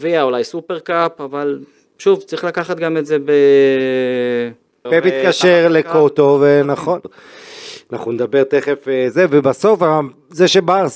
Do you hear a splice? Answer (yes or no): yes